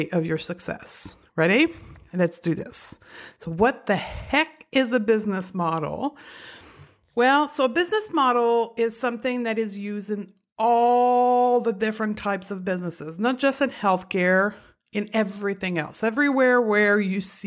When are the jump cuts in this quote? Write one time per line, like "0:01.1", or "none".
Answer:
none